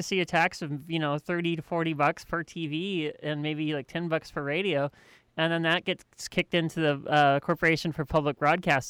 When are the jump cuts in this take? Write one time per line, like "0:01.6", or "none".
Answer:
none